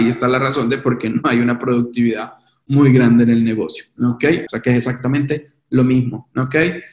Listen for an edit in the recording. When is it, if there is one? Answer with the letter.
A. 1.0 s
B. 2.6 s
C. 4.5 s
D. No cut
C